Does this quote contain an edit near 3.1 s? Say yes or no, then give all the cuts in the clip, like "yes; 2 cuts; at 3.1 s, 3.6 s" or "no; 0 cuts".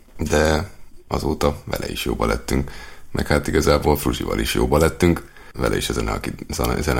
no; 1 cut; at 5.5 s